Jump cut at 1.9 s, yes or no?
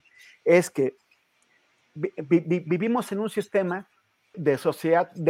no